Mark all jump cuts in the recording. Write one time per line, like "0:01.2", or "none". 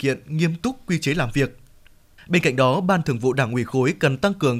0:02.2

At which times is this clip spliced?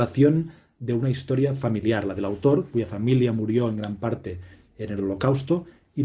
none

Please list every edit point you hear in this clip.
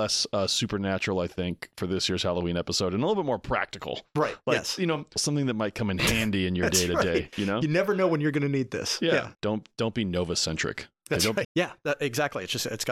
0:05.2
0:09.3
0:11.4

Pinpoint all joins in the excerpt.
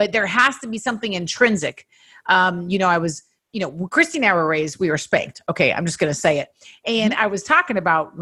none

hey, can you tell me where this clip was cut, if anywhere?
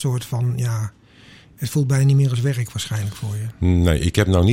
none

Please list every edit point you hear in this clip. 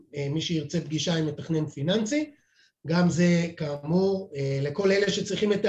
none

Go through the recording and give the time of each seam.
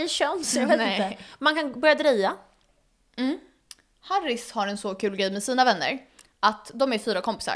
none

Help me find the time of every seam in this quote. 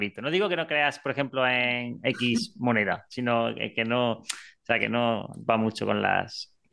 none

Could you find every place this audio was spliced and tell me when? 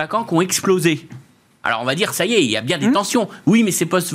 none

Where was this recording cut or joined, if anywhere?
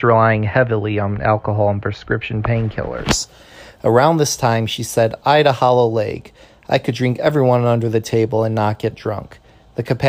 none

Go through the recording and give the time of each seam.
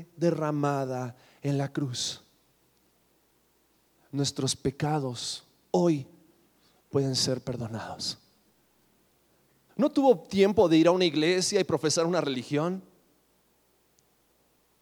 0:09.7

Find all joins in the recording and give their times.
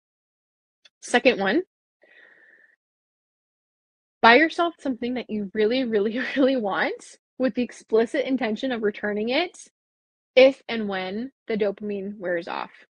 none

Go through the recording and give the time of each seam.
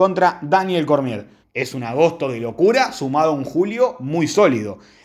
0:01.4

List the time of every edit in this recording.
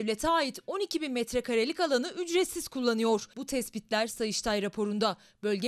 0:03.3

